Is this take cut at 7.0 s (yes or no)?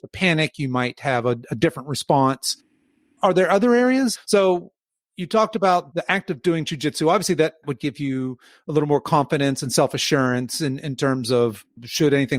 no